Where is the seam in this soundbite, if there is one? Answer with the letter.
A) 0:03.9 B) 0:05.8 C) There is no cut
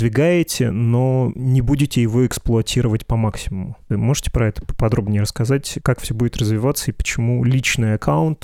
A